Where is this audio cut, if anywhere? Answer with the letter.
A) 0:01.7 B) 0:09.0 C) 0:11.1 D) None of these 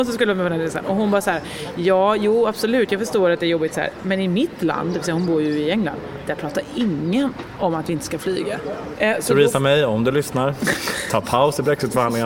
B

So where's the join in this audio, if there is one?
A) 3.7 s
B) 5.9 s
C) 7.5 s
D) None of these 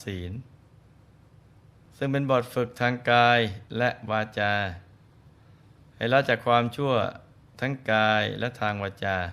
A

